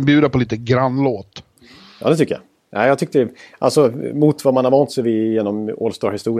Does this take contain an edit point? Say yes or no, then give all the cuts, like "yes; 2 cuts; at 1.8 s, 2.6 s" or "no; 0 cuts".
no; 0 cuts